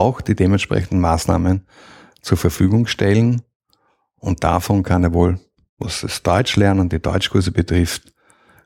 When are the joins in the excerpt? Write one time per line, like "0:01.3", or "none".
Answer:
none